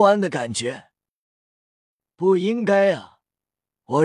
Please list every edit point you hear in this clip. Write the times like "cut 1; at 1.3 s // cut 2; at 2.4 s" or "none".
cut 1; at 2.1 s